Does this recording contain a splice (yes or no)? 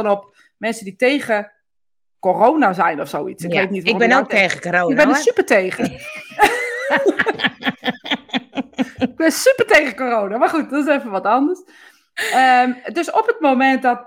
no